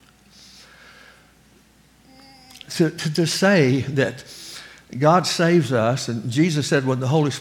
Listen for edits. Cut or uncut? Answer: uncut